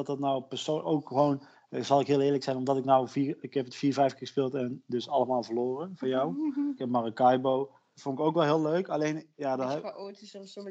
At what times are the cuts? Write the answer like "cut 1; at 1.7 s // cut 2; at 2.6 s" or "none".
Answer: cut 1; at 6.8 s // cut 2; at 7.9 s